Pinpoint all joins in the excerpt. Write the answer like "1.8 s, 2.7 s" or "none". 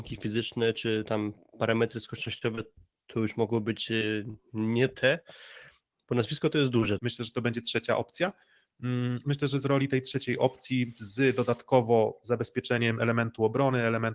7.0 s, 9.2 s